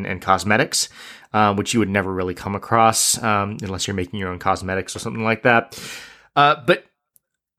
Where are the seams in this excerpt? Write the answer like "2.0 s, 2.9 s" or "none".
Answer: none